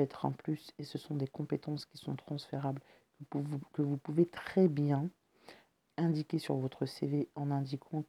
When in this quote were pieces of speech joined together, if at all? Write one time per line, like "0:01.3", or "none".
0:05.9